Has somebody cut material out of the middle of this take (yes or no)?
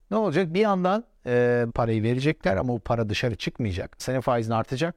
yes